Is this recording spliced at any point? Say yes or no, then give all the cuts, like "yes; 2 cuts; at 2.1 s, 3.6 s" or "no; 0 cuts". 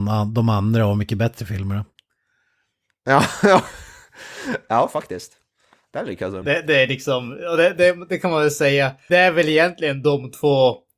yes; 2 cuts; at 6.4 s, 9.1 s